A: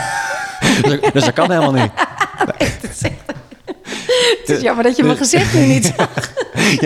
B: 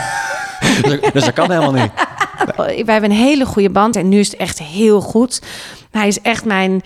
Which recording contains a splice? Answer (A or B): B